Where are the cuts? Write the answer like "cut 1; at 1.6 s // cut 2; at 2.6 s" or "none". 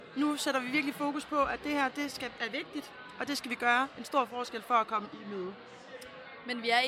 none